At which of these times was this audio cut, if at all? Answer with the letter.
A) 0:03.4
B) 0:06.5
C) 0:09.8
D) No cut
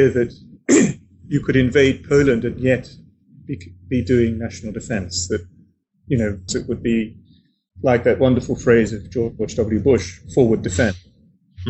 B